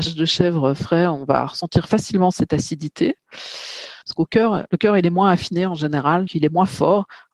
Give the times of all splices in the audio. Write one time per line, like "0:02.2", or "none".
0:04.0
0:06.3

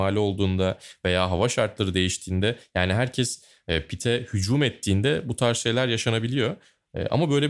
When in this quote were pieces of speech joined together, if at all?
none

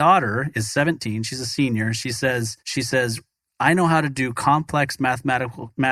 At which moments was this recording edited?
0:02.6

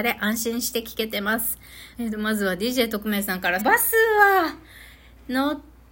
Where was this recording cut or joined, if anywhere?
0:01.9
0:03.6

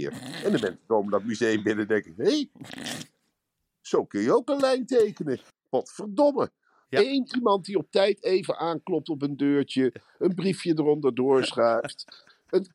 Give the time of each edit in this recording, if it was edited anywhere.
0:06.8

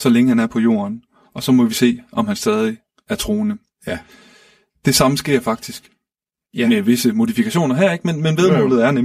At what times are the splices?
none

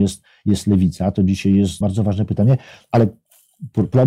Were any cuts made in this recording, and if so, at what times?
0:01.8

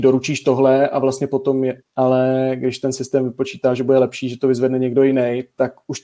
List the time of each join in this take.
0:01.8

